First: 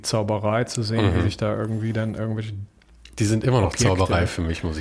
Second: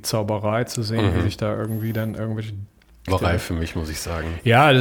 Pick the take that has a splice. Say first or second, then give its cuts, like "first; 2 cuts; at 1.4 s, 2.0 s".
second; 1 cut; at 3.1 s